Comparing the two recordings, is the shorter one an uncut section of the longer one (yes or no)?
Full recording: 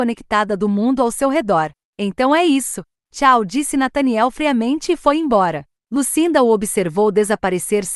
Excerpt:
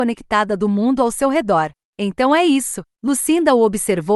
no